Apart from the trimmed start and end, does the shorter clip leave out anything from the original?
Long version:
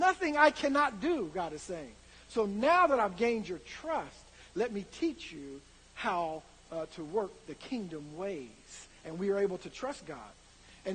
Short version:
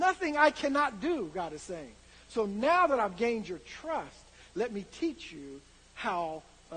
no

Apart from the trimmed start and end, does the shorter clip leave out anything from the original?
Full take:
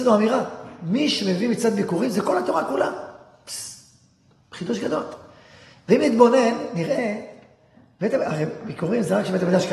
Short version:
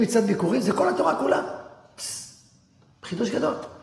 no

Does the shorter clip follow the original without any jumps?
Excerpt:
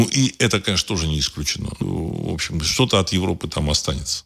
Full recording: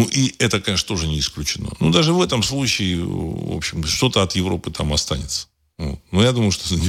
no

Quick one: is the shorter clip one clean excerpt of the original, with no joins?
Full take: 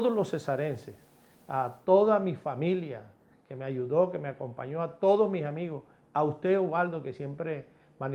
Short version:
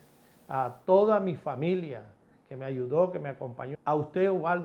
no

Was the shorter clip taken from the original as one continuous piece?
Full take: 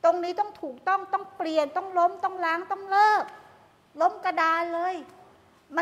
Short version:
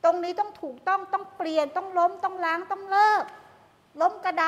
yes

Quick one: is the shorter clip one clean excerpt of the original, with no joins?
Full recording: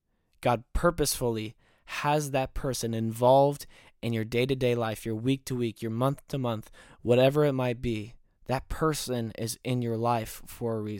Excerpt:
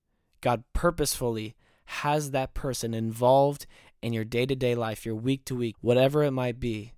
no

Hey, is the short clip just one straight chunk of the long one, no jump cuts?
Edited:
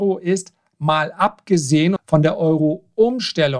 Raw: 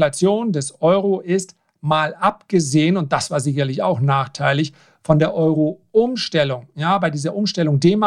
no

